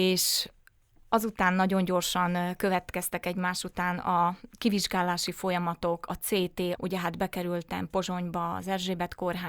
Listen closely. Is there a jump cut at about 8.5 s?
no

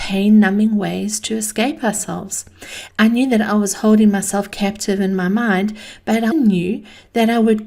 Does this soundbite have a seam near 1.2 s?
no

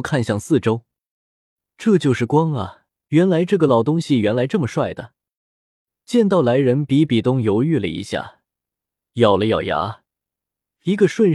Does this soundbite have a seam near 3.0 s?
yes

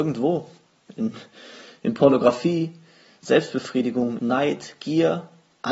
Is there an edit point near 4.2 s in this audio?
yes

